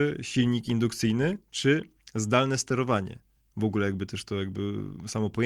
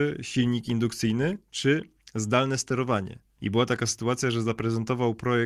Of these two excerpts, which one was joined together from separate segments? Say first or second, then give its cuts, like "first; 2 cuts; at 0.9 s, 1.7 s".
second; 1 cut; at 3.4 s